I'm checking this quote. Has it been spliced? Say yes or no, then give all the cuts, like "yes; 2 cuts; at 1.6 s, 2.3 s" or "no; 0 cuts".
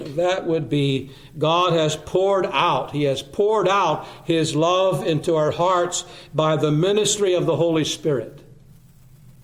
no; 0 cuts